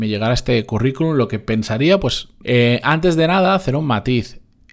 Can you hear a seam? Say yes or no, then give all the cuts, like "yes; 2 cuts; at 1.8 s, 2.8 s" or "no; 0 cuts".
yes; 1 cut; at 2.4 s